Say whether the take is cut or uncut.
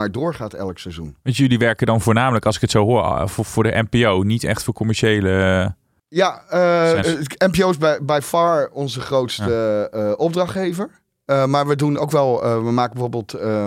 cut